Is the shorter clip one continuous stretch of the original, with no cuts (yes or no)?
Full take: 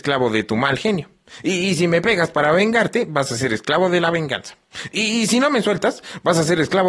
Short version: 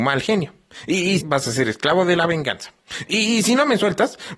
no